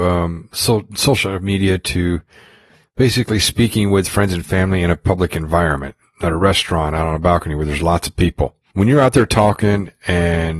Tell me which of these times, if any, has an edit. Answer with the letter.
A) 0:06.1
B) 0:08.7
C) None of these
B